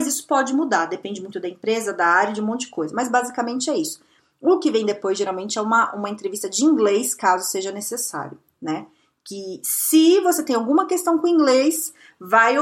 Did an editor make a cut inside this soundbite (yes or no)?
no